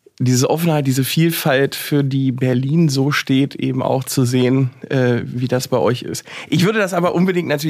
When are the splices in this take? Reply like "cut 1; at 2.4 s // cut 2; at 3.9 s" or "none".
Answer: none